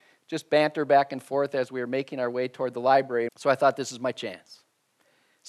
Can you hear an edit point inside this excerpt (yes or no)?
yes